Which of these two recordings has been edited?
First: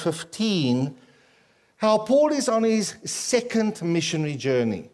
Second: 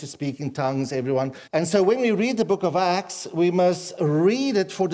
second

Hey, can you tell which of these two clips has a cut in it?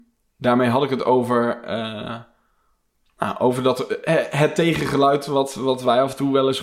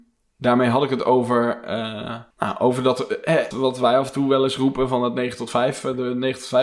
second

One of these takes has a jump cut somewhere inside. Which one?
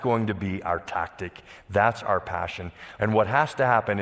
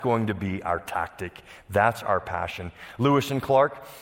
first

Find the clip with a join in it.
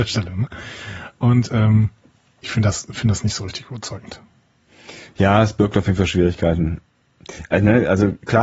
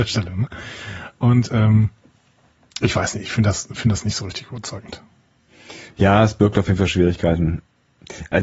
first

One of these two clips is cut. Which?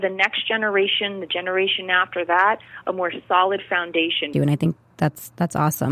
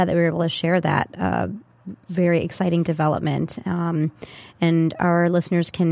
first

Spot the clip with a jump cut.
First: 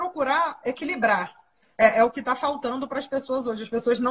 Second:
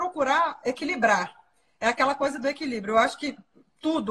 first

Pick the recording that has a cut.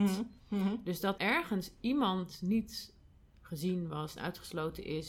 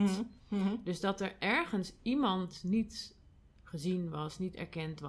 first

